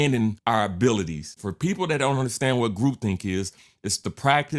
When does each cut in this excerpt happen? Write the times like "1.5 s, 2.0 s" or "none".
1.4 s